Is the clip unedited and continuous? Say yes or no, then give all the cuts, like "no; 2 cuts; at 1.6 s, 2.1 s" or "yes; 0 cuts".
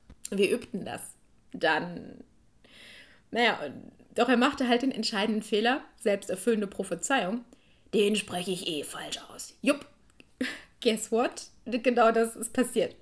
yes; 0 cuts